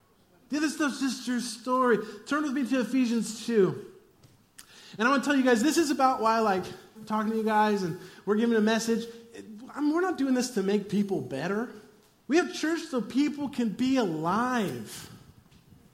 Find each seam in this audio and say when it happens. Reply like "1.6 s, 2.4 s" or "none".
7.0 s, 12.2 s